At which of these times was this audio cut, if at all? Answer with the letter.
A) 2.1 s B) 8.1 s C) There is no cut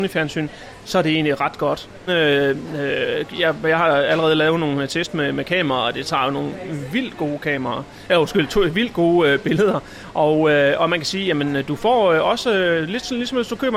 A